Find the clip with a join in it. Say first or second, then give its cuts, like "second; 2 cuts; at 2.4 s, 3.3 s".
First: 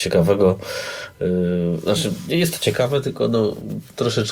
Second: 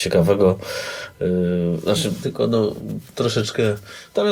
second; 1 cut; at 2.2 s